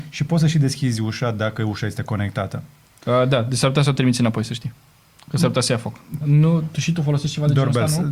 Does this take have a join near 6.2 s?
yes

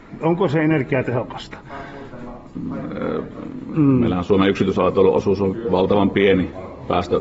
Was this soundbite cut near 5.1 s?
no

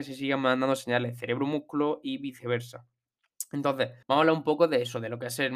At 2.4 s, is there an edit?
no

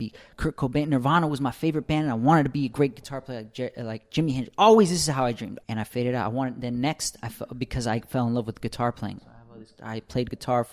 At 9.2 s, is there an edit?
yes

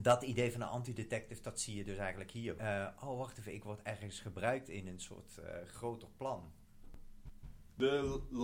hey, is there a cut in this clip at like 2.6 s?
yes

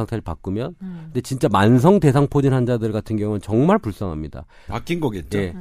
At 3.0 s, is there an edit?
no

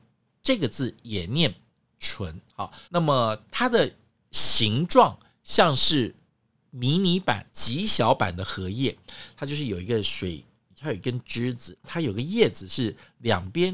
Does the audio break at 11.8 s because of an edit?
yes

